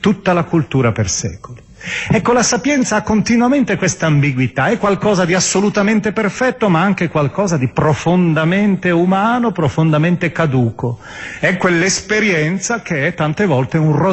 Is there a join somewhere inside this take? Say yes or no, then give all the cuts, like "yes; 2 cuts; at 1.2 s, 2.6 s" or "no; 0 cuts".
no; 0 cuts